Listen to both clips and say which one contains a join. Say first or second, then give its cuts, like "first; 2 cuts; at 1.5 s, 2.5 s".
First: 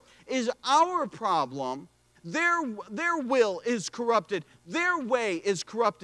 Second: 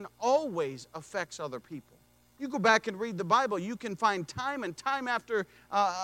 first; 1 cut; at 2.1 s